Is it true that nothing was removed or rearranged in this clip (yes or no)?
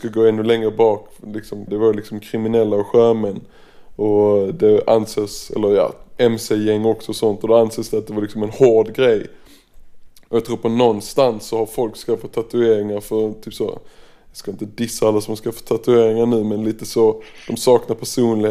no